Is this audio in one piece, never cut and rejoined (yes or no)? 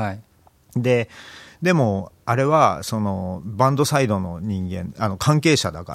yes